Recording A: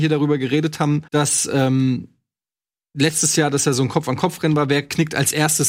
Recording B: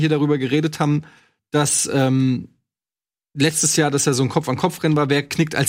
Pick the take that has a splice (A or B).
A